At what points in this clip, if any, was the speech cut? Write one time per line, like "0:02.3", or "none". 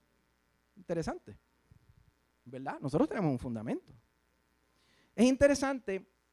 none